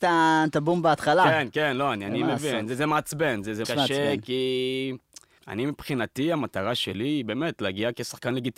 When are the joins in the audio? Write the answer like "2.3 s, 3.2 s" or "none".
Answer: 3.6 s, 5.4 s